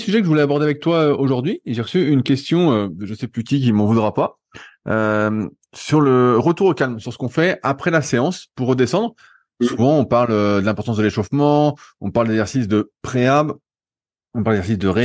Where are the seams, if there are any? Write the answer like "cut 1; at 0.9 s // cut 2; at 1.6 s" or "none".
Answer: none